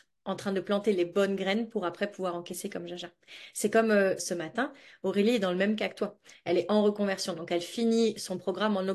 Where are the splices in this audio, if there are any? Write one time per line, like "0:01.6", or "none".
0:04.2